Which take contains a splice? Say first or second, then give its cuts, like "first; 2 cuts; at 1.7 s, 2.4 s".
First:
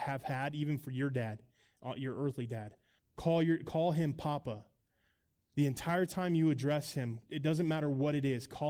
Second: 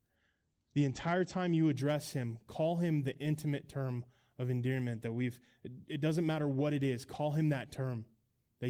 first; 2 cuts; at 3.0 s, 7.3 s